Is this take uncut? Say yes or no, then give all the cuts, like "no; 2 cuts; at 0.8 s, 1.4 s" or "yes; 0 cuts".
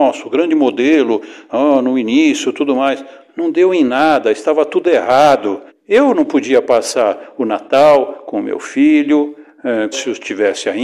no; 2 cuts; at 5.7 s, 9.9 s